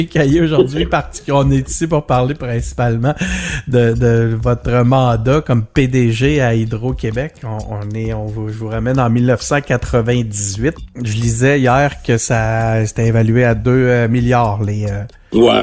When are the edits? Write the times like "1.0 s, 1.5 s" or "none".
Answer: none